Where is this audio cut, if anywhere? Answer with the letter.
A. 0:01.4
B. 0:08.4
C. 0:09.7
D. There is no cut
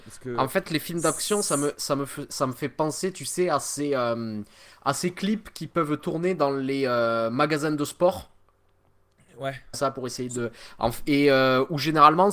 C